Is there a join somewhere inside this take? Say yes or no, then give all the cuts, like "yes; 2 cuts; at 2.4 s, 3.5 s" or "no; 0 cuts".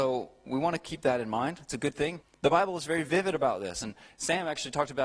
yes; 1 cut; at 2.2 s